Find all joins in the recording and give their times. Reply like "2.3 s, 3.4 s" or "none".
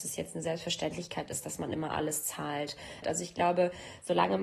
3.0 s